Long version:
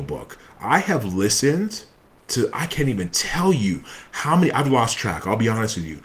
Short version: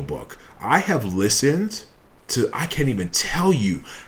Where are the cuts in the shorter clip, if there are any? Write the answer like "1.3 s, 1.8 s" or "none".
none